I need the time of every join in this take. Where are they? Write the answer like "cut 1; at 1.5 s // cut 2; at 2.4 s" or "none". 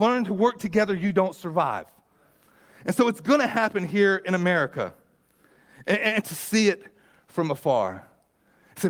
cut 1; at 6.2 s